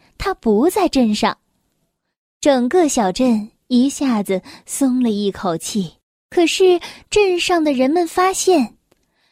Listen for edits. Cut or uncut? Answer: uncut